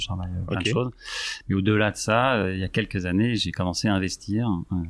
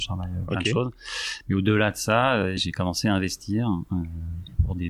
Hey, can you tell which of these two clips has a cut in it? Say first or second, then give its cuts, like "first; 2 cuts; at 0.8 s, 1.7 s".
second; 1 cut; at 2.6 s